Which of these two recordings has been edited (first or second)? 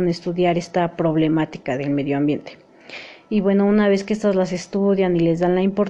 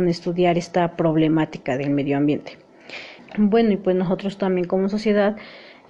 second